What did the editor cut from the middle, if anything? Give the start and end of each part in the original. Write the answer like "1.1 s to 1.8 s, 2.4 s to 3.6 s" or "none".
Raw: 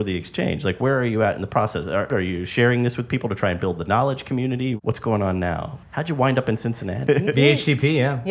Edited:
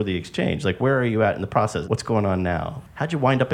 1.8 s to 4.8 s

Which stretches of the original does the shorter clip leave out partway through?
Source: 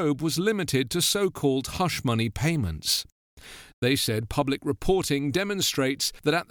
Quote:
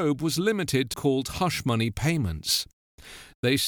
0.9 s to 1.3 s

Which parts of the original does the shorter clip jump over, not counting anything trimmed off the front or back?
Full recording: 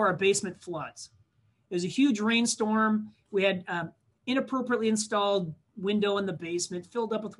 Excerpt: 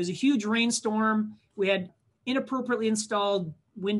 3.6 s to 3.9 s

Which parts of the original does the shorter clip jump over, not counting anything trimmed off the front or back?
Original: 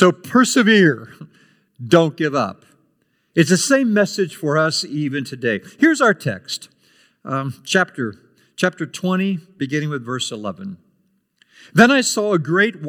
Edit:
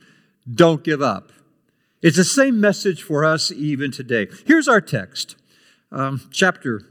none

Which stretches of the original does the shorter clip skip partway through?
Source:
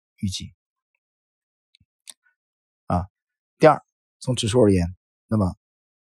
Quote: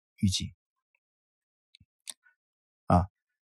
none

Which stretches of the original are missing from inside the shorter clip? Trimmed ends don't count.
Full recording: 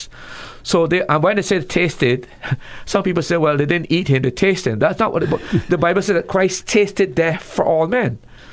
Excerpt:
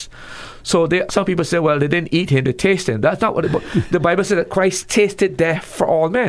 1.1 s to 2.8 s

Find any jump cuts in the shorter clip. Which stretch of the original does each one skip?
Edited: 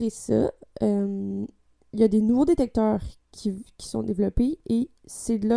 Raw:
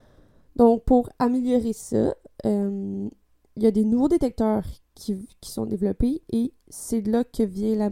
none

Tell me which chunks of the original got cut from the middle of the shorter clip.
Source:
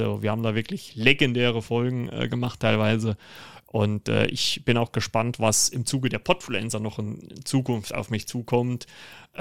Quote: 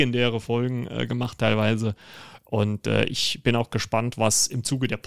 none

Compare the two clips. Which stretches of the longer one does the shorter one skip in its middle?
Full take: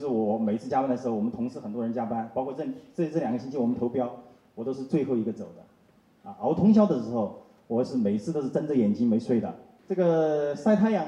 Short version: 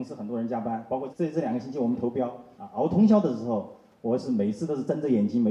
2.6 s to 2.9 s, 4.3 s to 6.2 s

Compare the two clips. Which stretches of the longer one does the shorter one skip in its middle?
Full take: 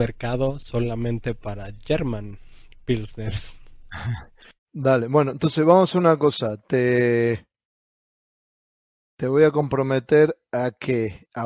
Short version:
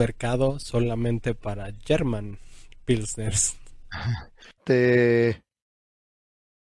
4.6 s to 6.6 s

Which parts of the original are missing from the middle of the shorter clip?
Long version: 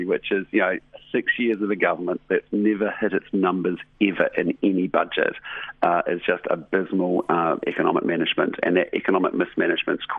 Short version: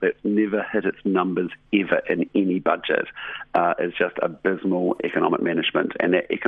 7.3 s to 7.6 s

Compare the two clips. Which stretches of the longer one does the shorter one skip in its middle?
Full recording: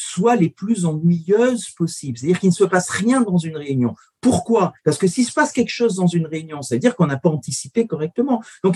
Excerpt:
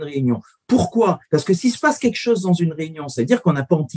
none

